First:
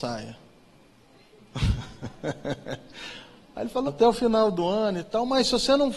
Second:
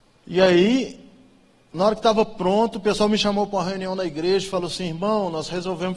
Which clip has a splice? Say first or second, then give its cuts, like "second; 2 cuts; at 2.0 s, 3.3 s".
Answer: first; 1 cut; at 3.9 s